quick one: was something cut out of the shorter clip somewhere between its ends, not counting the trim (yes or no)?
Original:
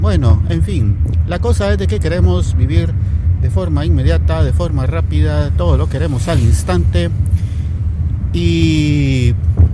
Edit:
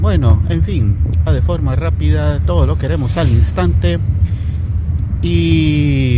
yes